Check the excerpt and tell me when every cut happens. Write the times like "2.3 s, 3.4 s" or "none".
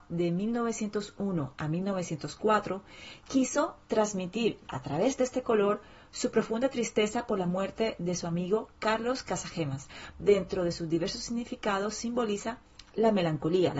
10.1 s